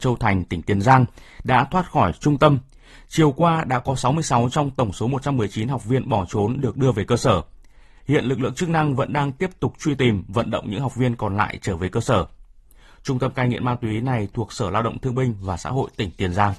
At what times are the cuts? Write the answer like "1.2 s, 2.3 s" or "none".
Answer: none